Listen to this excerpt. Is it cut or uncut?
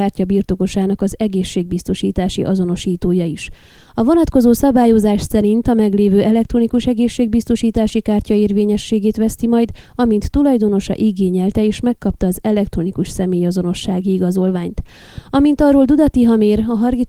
uncut